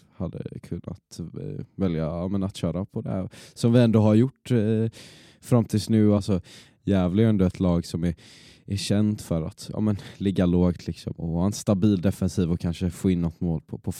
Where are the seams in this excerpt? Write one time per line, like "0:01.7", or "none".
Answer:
0:06.2
0:11.2